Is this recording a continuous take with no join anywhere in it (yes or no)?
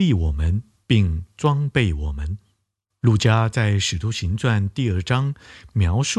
no